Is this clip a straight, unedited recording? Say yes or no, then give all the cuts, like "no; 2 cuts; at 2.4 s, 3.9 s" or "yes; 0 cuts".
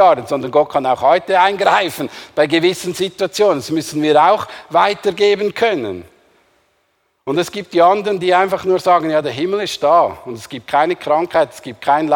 yes; 0 cuts